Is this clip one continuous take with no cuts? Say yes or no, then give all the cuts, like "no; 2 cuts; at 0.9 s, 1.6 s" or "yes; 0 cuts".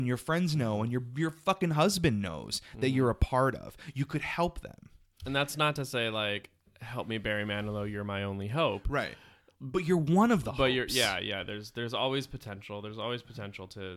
yes; 0 cuts